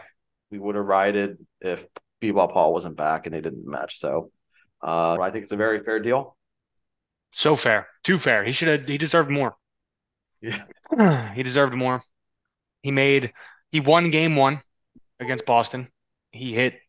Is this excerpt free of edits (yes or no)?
no